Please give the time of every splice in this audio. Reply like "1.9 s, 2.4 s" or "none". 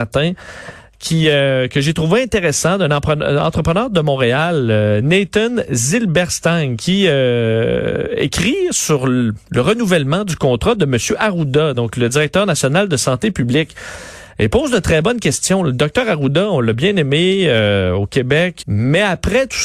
18.6 s